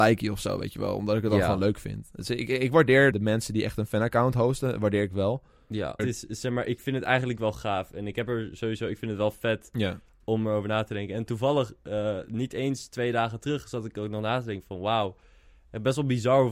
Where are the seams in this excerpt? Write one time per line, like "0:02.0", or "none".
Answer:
0:03.1
0:06.0